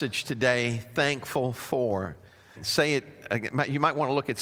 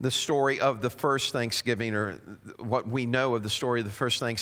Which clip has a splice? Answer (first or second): first